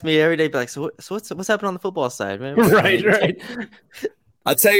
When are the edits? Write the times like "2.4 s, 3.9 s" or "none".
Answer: 2.5 s